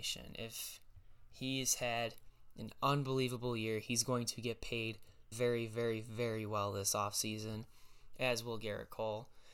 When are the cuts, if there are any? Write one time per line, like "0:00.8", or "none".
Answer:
0:05.3